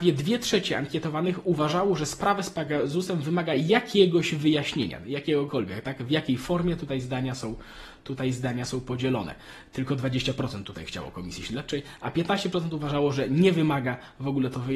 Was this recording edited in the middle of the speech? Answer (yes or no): no